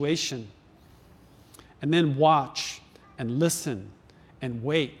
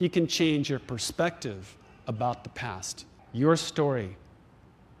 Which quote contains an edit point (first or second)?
second